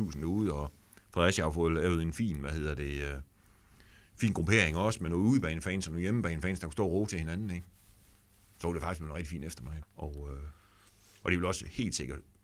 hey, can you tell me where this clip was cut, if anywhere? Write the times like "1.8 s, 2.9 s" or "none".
9.8 s